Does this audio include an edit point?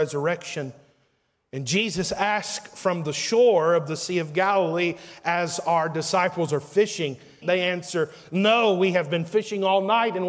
yes; 1 cut; at 7.4 s

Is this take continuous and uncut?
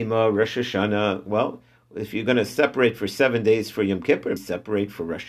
no; 1 cut; at 4.4 s

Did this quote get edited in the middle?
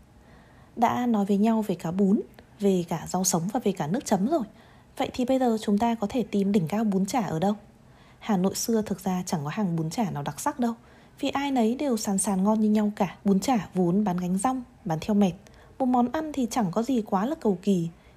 yes; 2 cuts; at 2.5 s, 13.2 s

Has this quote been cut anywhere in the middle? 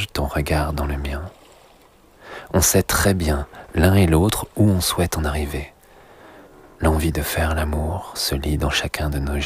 no; 0 cuts

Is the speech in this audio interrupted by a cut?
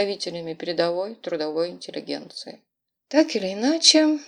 no; 0 cuts

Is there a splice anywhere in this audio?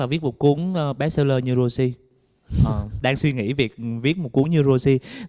yes; 1 cut; at 3.0 s

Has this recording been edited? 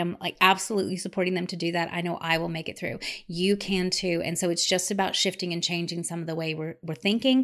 no; 0 cuts

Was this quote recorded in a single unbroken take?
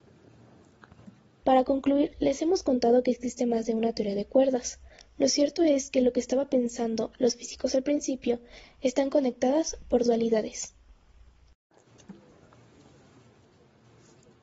no; 2 cuts; at 1.4 s, 8.6 s

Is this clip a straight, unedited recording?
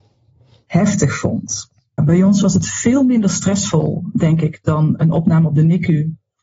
no; 1 cut; at 2.0 s

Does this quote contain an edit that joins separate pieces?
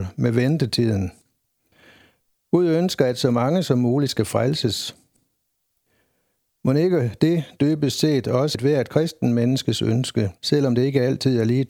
yes; 2 cuts; at 8.5 s, 10.4 s

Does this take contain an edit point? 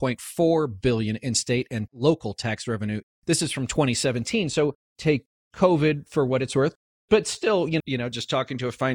yes; 1 cut; at 7.8 s

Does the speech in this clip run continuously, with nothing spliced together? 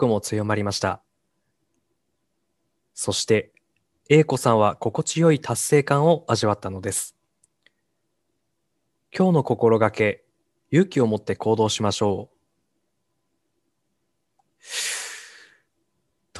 yes; 0 cuts

